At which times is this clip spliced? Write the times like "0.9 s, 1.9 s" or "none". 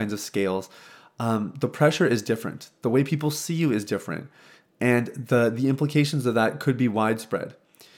none